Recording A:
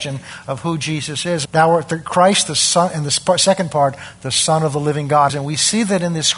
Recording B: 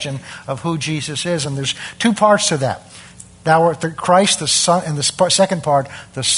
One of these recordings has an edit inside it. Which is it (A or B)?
A